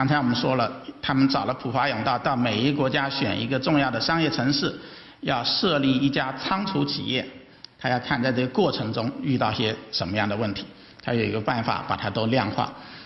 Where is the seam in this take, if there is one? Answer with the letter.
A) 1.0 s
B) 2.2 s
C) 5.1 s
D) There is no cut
D